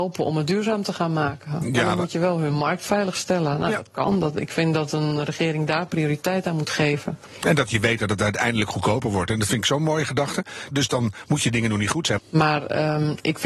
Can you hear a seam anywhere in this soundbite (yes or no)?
yes